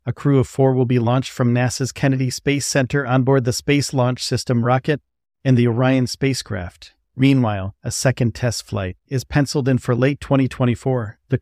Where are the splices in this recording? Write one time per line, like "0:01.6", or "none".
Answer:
0:07.0
0:09.1